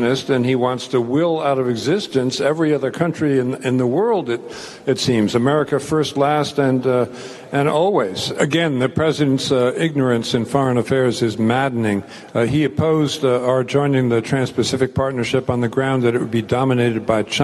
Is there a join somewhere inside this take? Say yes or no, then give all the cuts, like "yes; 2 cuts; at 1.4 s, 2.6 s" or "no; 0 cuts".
no; 0 cuts